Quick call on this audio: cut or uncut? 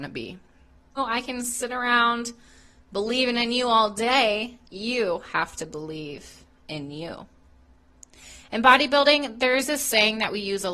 cut